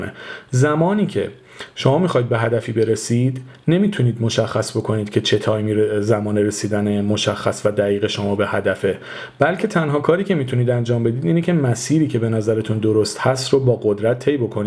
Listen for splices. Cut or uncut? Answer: uncut